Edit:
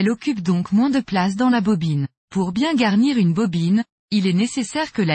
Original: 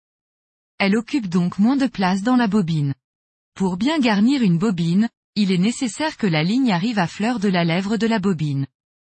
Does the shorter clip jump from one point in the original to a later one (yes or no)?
yes